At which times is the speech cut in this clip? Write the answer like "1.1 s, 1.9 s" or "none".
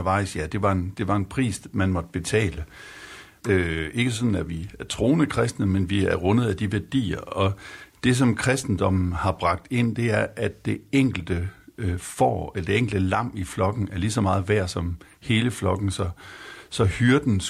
3.4 s